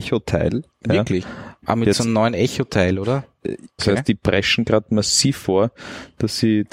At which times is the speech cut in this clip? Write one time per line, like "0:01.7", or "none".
0:01.6
0:03.8